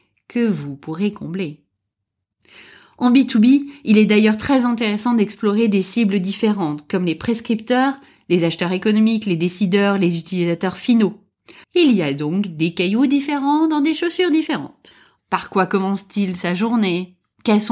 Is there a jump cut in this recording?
yes; 2 cuts; at 11.6 s, 15.2 s

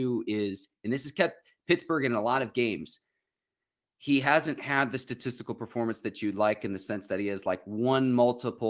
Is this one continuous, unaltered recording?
yes; 0 cuts

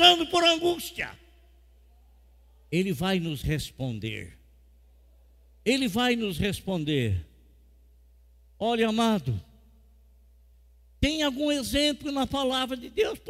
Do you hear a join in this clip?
no; 0 cuts

